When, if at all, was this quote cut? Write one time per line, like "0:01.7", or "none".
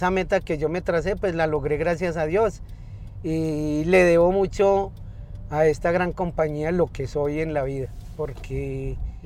none